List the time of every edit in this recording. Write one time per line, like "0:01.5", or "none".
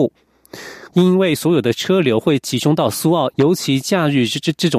0:00.9
0:03.3